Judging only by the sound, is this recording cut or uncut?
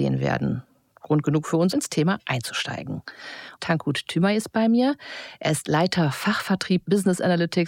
cut